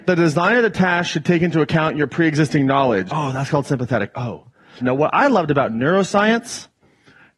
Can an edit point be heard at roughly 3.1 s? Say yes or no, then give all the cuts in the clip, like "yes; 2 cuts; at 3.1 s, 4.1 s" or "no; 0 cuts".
yes; 2 cuts; at 3.1 s, 4.8 s